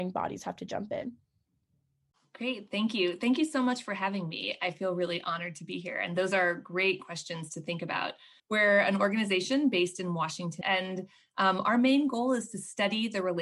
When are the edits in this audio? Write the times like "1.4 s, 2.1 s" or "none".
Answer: 8.4 s, 10.6 s

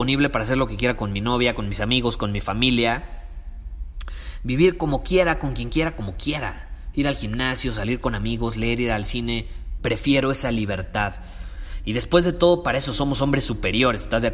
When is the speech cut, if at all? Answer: 9.8 s

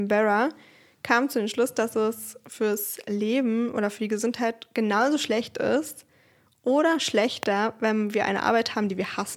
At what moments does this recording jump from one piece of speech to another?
none

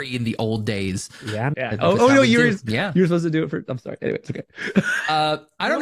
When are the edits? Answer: 1.5 s

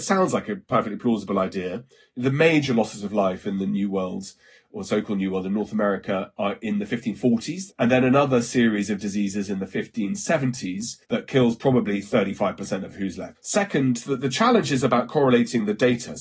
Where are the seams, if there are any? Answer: 7.7 s, 11.0 s, 13.3 s

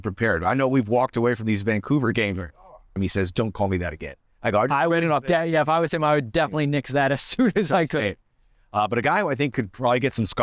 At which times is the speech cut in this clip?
3.0 s

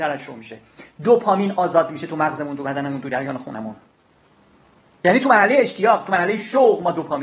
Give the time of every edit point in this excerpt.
none

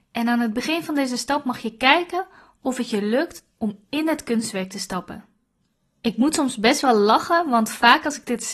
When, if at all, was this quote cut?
none

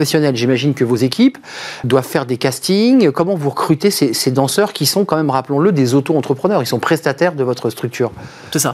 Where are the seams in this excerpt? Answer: 1.8 s

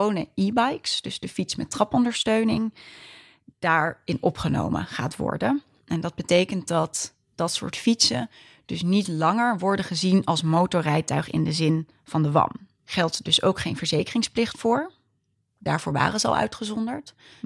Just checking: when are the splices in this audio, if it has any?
none

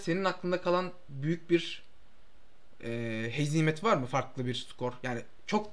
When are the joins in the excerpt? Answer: none

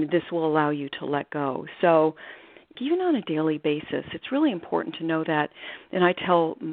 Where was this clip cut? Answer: 2.8 s

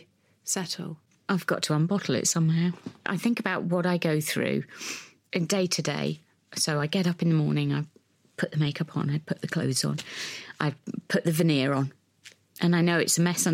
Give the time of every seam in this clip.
3.0 s

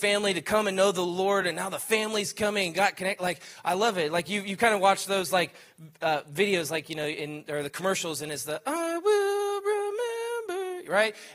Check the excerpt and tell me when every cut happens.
none

